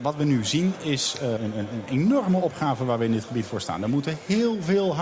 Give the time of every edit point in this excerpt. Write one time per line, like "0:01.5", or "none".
0:01.4